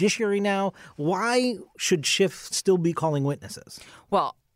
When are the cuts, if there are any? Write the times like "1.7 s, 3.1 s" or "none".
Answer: none

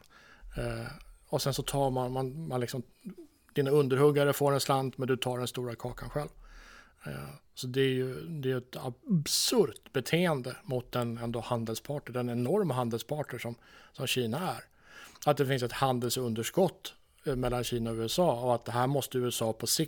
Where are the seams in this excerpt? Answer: none

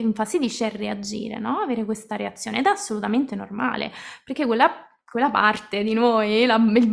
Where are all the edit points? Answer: none

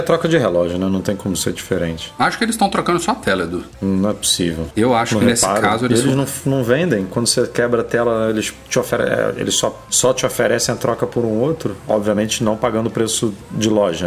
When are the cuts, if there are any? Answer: 4.7 s

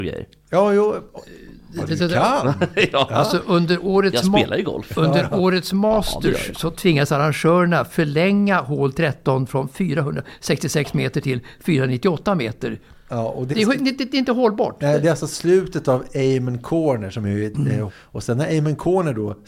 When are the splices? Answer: 13.5 s, 17.9 s

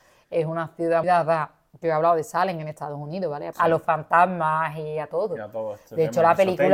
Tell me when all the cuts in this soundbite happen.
1.0 s, 3.5 s

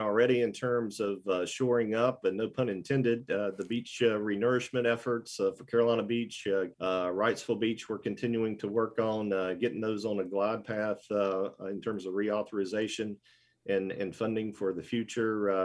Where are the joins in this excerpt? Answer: 6.7 s

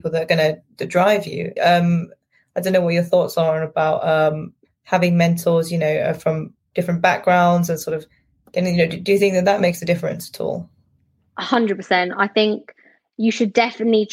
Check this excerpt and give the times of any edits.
1.6 s

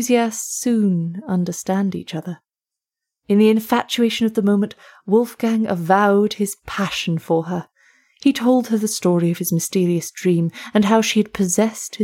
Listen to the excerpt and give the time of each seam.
none

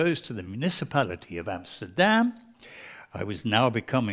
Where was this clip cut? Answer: none

